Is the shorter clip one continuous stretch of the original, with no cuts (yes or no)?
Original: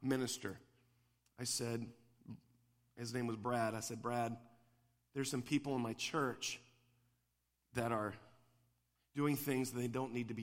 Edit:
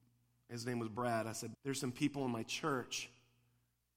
no